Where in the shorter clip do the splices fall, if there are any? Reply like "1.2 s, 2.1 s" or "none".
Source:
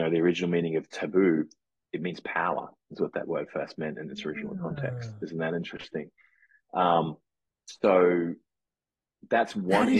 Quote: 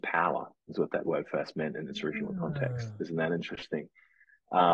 none